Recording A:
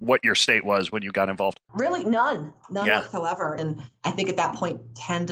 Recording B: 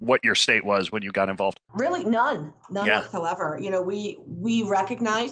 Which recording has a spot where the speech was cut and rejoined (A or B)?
A